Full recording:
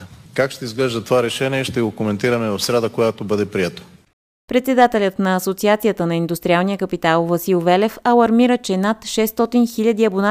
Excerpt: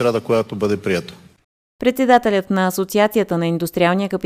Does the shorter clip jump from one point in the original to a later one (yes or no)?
no